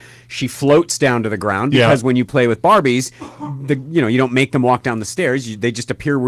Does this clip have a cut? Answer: no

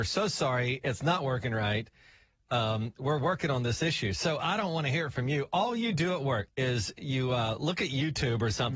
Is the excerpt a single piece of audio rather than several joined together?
no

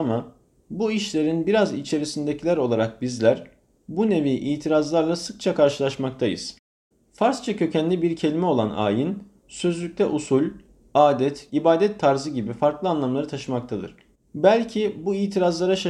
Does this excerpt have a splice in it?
yes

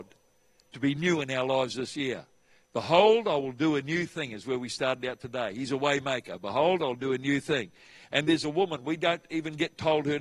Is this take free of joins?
yes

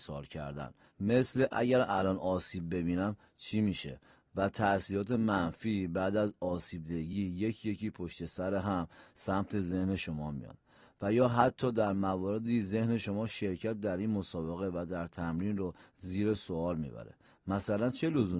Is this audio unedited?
yes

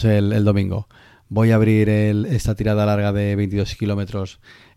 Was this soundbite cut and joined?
no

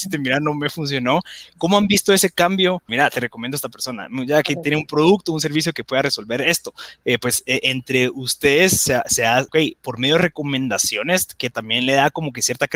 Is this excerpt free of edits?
no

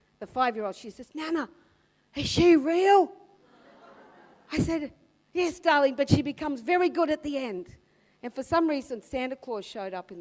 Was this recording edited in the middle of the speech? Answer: no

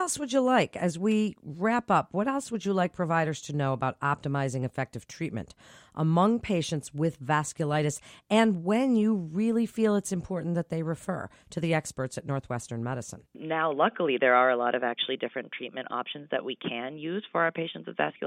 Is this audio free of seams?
no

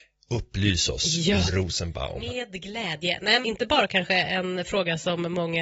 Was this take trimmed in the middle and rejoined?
yes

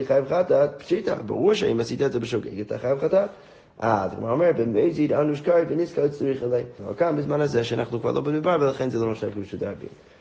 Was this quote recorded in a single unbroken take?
no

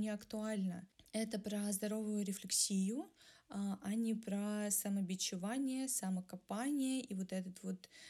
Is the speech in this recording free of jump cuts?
yes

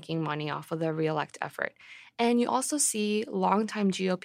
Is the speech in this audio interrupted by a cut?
no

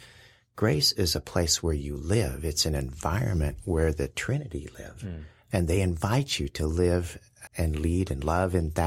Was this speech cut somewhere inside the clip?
yes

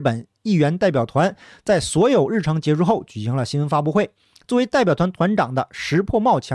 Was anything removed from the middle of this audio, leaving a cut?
no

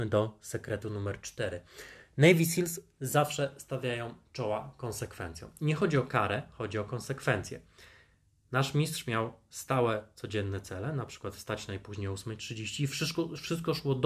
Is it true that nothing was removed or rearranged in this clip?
yes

